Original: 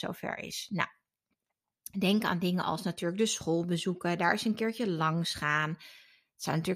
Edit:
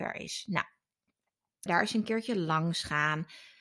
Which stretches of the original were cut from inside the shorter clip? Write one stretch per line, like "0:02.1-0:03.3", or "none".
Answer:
0:01.9-0:04.2